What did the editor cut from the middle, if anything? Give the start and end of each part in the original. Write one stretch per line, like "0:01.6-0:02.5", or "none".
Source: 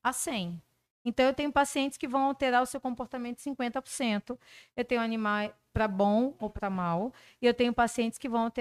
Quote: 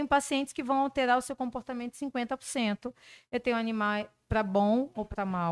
none

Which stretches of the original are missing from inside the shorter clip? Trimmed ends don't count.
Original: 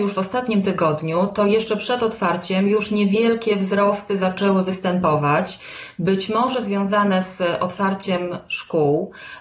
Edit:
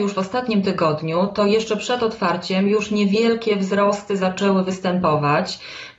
none

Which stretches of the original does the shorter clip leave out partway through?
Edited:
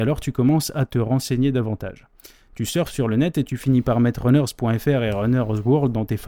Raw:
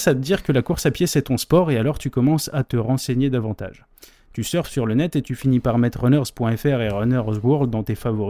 none

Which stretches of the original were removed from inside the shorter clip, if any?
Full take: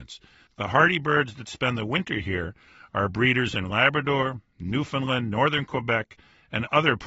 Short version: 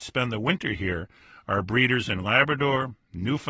none

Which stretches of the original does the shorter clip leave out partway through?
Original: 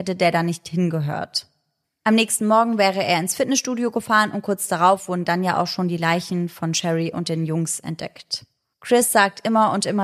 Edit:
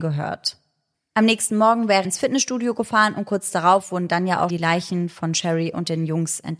0:02.9-0:03.2
0:05.7-0:05.9

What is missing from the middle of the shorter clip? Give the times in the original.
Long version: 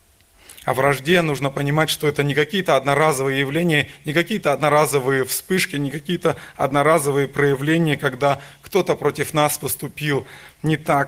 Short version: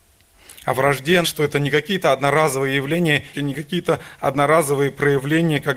0:01.2-0:01.9
0:04.0-0:05.7

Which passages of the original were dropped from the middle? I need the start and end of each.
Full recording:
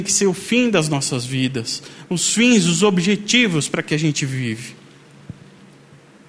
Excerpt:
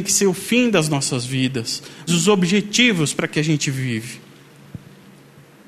0:02.1-0:02.6

